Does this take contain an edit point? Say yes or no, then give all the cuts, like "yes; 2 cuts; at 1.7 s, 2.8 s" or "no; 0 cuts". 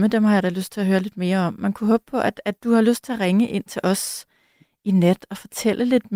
no; 0 cuts